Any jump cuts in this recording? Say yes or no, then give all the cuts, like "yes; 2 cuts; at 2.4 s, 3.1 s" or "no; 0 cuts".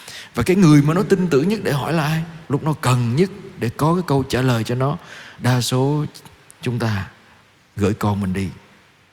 yes; 1 cut; at 2.4 s